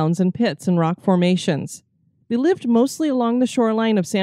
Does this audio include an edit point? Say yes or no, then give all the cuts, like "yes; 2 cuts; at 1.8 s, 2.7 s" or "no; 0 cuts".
no; 0 cuts